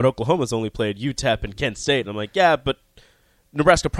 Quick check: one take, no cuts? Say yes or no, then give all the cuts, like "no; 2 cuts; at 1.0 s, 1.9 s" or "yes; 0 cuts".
yes; 0 cuts